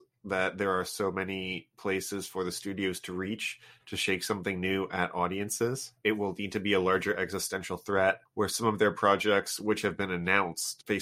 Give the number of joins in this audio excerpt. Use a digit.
1